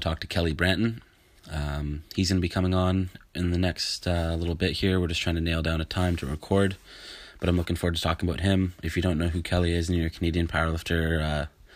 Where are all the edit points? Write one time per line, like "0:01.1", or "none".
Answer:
none